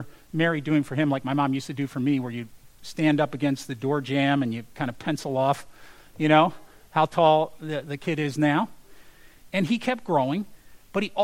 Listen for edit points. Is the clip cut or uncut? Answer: uncut